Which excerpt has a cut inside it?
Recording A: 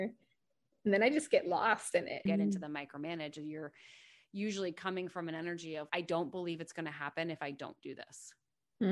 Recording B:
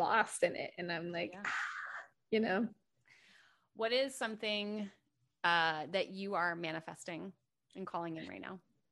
A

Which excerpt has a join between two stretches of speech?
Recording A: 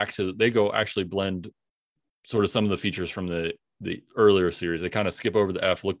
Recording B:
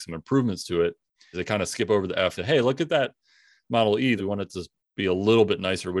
B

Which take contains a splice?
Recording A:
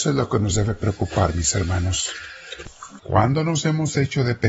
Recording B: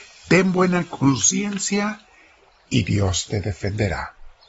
A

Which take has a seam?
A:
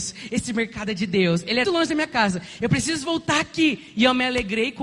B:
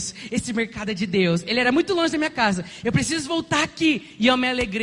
A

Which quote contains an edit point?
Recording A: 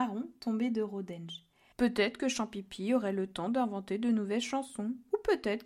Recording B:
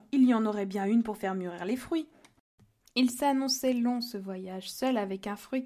A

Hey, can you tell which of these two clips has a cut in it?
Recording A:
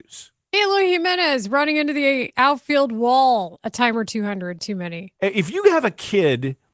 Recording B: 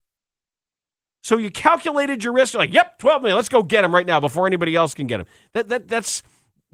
A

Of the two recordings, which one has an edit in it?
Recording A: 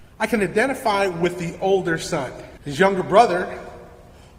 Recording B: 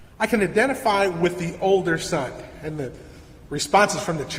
A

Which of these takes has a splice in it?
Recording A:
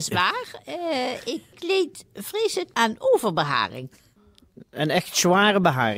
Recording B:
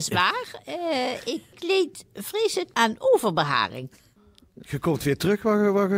B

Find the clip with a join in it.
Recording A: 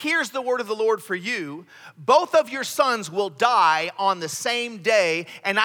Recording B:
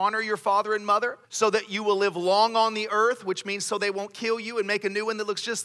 B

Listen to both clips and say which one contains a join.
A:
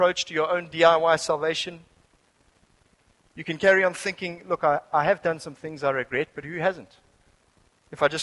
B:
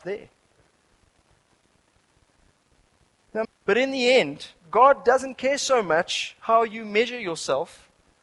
B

